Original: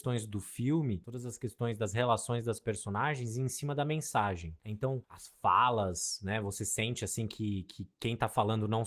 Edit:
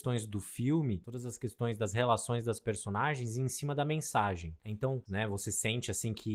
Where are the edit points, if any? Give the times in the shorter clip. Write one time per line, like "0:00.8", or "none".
0:05.1